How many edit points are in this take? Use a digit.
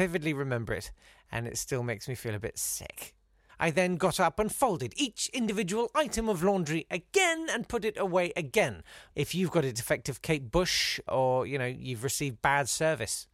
3